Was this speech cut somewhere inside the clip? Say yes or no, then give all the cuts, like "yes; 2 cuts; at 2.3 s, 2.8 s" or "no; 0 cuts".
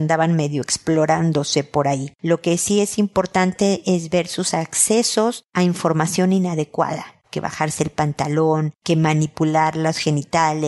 yes; 1 cut; at 7.2 s